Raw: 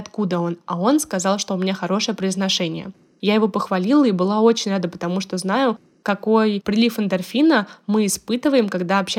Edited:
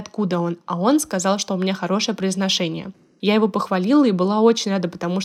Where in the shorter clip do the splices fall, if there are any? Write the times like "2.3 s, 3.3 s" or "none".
none